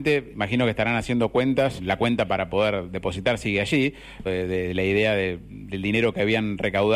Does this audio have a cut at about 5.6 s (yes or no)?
no